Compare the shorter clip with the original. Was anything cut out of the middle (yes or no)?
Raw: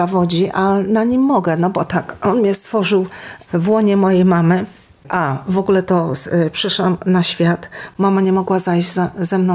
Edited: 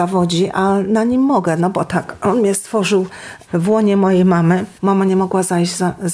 yes